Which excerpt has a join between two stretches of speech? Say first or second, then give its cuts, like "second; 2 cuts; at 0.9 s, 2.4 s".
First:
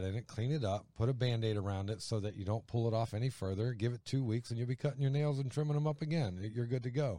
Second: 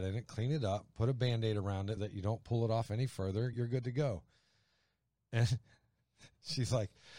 second; 2 cuts; at 2.0 s, 3.5 s